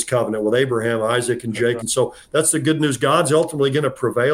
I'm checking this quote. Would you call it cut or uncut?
cut